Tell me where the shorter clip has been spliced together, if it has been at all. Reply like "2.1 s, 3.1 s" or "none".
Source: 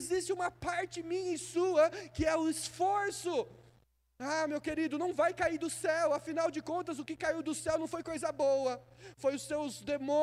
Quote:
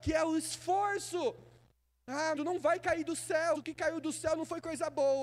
2.4 s, 3.5 s